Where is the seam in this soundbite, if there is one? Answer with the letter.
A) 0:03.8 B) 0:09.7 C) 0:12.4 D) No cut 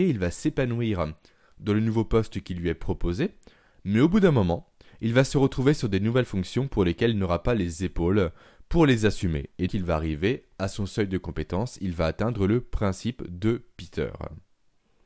B